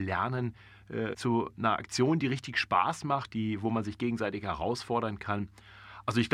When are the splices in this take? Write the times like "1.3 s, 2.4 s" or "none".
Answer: 1.1 s